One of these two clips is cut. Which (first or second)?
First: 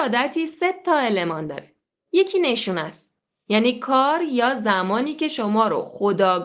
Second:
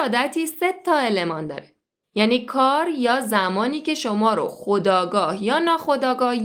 second